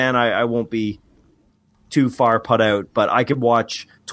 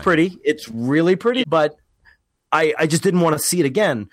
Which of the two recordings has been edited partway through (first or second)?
second